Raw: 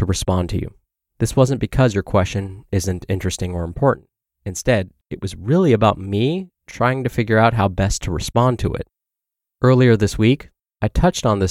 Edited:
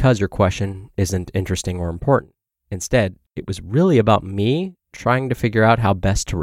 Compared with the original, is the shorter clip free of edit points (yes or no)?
yes